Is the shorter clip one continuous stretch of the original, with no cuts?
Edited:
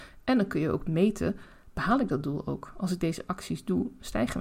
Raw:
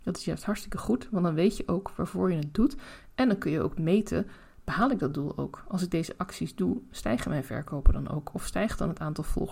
yes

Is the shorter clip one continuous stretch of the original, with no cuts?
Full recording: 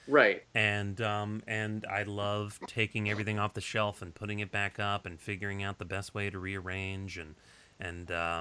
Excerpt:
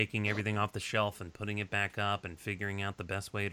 yes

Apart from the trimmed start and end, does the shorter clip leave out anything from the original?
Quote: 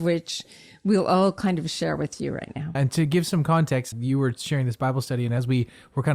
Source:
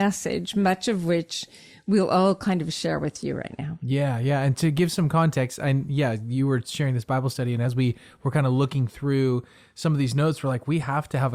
yes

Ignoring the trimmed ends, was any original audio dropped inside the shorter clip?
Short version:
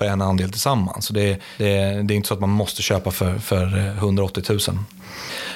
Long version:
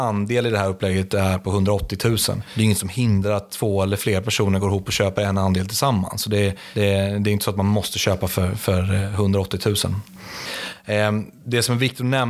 no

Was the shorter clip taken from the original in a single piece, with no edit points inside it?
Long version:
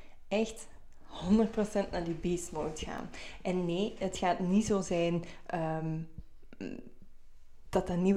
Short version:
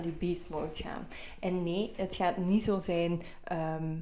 yes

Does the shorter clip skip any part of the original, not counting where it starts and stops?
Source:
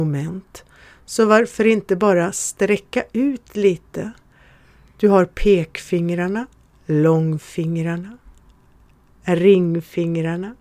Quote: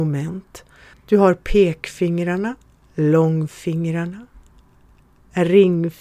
yes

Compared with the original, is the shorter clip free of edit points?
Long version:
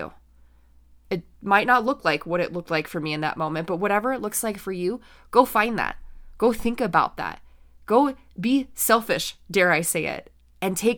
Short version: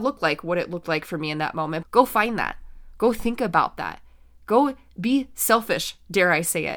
no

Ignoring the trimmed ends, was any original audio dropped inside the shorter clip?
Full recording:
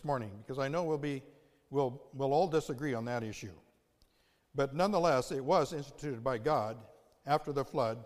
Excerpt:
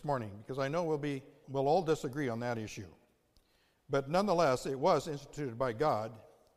yes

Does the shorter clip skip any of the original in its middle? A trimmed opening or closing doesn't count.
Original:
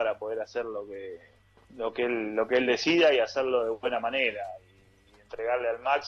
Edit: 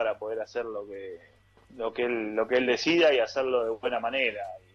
no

